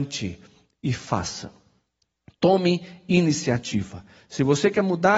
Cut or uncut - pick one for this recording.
uncut